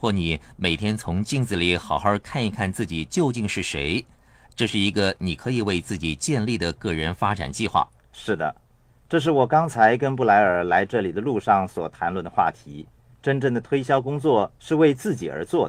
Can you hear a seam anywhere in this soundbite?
no; 0 cuts

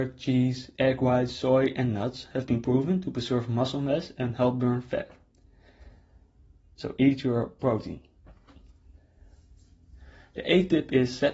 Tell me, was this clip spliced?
no; 0 cuts

